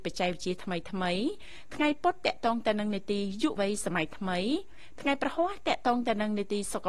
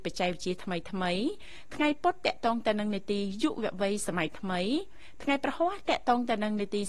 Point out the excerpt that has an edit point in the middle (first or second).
first